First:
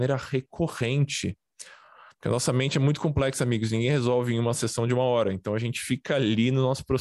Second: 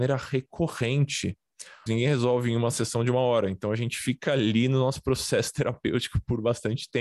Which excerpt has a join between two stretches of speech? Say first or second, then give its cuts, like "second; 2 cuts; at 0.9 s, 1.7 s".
second; 1 cut; at 1.9 s